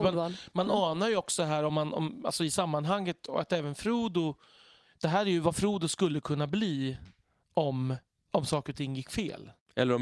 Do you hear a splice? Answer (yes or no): no